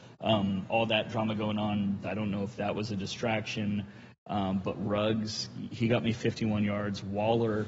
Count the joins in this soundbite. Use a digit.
1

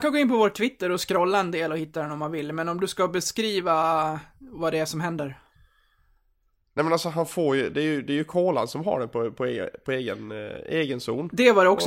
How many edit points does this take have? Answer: 0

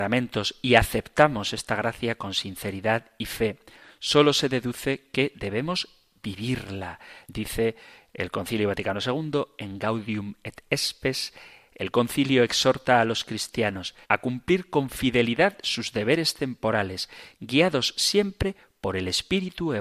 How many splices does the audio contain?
2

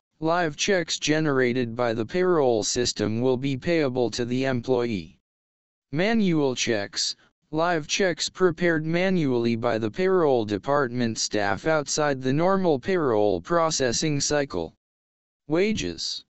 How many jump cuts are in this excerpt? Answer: 0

